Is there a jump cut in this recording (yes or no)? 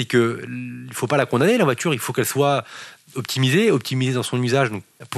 no